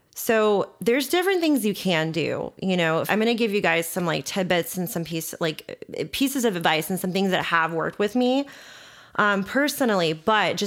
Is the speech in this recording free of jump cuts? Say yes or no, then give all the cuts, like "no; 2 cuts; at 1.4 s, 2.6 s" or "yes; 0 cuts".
no; 1 cut; at 3.1 s